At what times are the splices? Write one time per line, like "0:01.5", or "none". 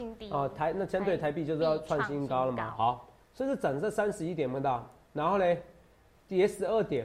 0:02.7
0:05.0